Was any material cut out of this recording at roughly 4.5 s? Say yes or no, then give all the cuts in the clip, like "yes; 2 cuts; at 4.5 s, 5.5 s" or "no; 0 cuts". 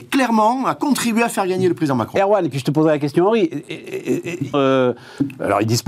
yes; 1 cut; at 4.5 s